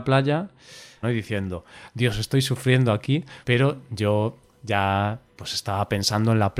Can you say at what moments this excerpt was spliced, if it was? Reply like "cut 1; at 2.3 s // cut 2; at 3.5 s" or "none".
cut 1; at 1.0 s